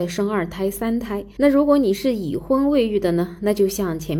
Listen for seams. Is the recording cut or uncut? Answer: cut